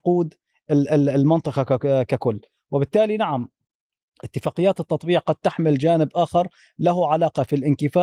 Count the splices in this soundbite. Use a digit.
0